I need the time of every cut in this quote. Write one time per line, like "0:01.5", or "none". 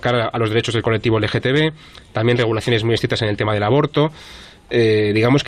none